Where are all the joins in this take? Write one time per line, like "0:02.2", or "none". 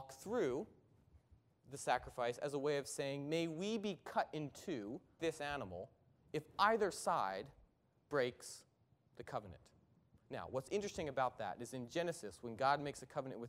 0:05.2